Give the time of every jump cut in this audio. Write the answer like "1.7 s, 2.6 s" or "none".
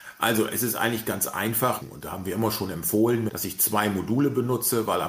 1.8 s, 3.3 s